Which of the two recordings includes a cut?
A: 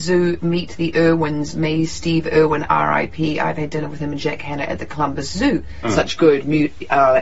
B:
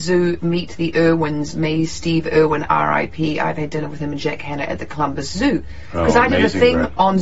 A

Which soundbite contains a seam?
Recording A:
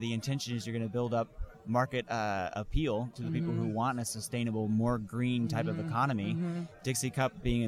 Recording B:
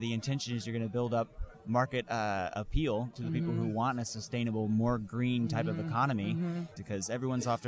B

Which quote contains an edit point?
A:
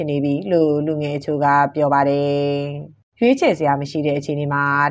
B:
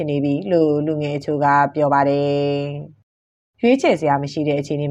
A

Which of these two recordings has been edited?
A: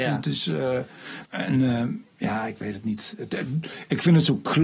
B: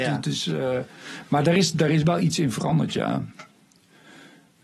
A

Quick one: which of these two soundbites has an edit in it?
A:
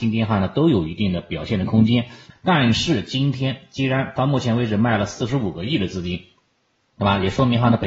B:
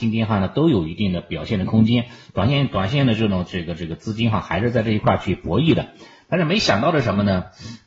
A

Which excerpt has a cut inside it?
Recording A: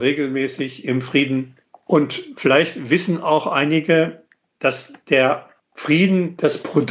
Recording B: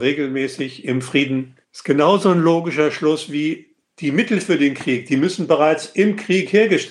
B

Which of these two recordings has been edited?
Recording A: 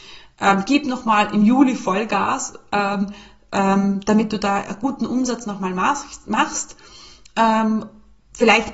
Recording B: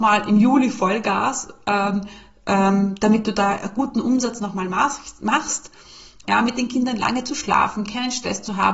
B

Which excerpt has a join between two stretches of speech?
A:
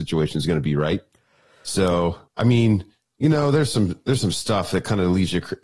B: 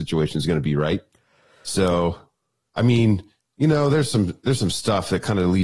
A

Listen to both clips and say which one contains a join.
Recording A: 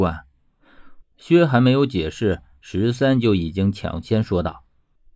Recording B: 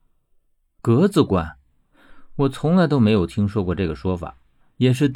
A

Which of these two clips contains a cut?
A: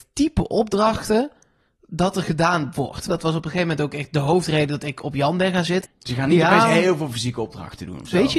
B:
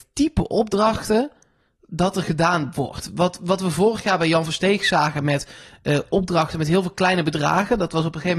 A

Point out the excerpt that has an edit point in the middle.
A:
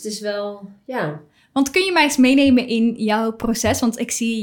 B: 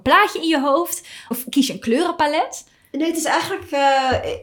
B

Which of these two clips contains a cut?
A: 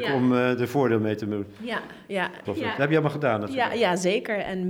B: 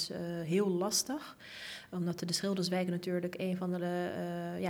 A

